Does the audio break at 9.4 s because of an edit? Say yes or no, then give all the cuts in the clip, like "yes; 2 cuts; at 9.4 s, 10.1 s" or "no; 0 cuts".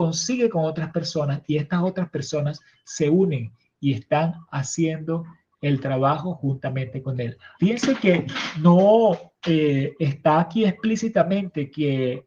no; 1 cut; at 7.6 s